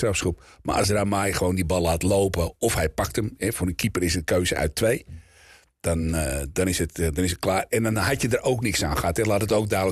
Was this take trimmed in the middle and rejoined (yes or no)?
no